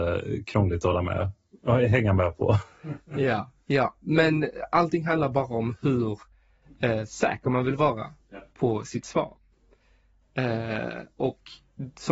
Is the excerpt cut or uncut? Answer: uncut